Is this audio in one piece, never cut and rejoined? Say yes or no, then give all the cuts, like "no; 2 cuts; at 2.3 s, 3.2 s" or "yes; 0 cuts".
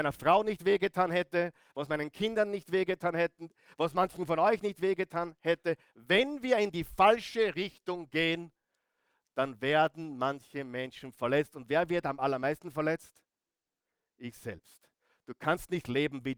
yes; 0 cuts